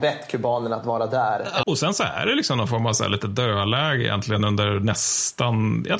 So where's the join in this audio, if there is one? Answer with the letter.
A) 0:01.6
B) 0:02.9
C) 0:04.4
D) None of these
A